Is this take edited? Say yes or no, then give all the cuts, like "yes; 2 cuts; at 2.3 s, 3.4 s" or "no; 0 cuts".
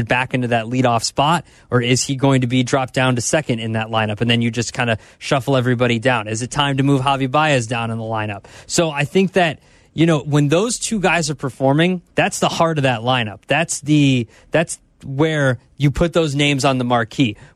yes; 1 cut; at 12.1 s